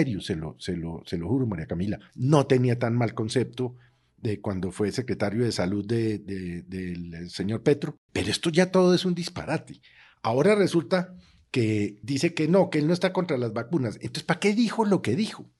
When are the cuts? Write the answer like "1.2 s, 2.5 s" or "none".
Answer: 2.1 s